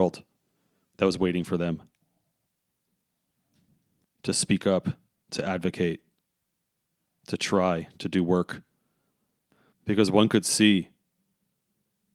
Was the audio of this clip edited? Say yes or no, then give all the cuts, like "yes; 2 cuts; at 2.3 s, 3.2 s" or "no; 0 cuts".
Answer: yes; 1 cut; at 9.7 s